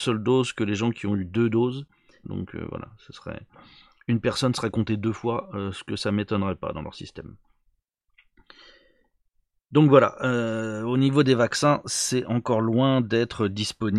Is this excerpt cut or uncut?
cut